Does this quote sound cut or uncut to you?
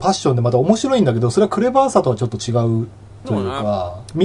uncut